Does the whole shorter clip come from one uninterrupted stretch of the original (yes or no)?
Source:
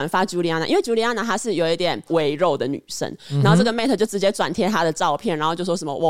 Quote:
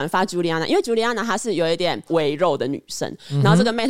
yes